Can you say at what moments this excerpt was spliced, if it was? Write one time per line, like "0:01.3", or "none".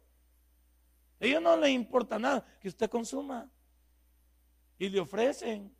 0:02.6